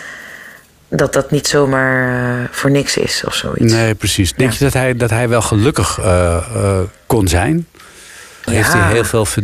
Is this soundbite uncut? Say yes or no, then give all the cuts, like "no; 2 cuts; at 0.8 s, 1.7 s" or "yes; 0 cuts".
no; 1 cut; at 8.5 s